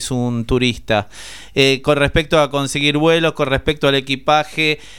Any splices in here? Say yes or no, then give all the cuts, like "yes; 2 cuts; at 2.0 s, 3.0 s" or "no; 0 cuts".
no; 0 cuts